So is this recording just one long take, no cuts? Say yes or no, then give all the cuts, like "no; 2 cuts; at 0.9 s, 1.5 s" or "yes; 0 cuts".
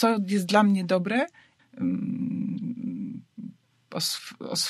no; 1 cut; at 1.6 s